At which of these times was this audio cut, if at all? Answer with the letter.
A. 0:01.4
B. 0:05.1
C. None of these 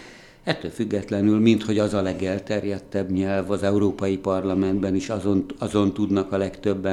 C